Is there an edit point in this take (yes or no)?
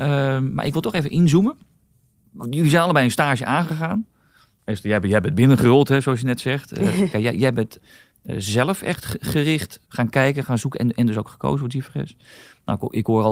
yes